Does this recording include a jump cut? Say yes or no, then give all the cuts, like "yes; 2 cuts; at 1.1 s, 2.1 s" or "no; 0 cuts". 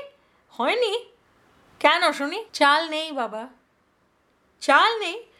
yes; 1 cut; at 2.5 s